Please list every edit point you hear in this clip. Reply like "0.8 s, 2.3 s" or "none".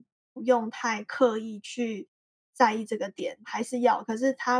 3.4 s